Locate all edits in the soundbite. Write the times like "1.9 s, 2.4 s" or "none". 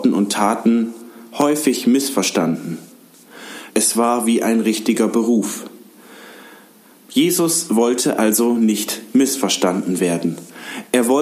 3.7 s, 7.1 s